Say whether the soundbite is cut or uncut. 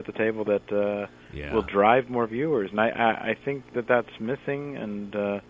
uncut